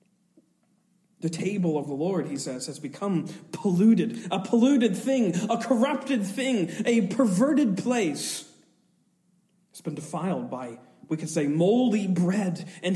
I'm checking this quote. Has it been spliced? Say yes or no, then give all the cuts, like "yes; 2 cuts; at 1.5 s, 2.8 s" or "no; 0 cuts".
no; 0 cuts